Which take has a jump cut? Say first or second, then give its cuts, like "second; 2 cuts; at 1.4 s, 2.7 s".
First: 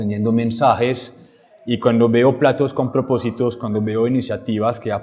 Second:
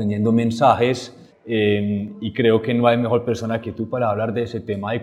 second; 2 cuts; at 1.3 s, 3.6 s